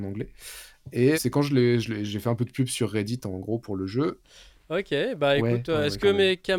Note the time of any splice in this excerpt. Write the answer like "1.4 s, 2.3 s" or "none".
1.1 s, 4.2 s